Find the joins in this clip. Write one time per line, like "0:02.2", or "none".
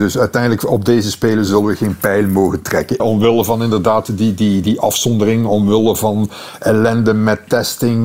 0:03.0